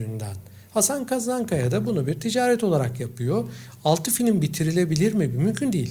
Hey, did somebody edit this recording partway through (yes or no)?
no